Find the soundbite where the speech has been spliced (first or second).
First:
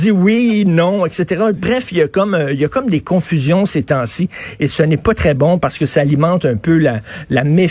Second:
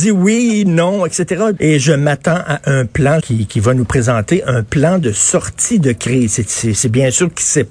second